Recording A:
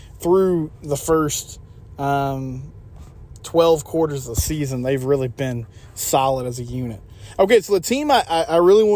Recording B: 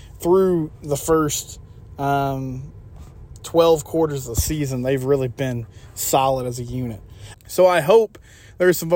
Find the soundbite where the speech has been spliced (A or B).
B